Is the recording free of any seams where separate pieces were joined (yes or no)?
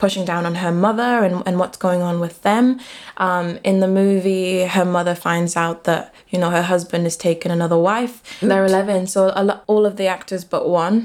no